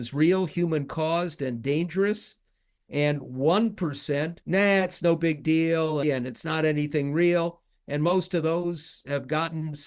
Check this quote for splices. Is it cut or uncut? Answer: cut